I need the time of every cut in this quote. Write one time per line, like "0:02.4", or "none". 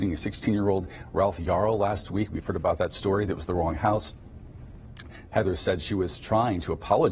0:03.3
0:05.3